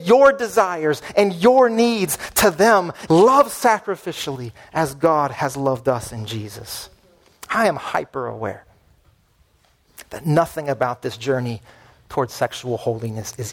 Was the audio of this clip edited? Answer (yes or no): yes